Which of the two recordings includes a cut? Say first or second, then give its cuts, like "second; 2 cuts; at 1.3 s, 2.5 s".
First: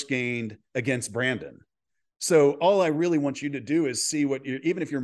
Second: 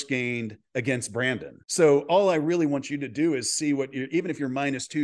second; 1 cut; at 1.6 s